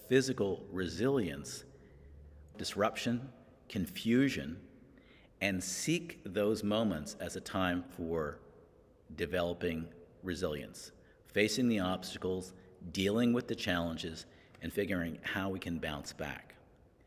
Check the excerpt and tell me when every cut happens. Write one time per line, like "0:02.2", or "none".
0:02.5